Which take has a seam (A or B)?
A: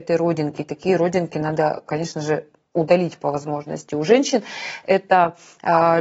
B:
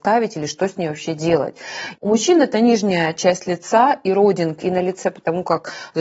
B